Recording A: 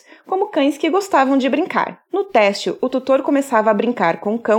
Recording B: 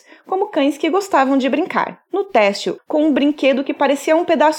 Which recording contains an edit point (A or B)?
B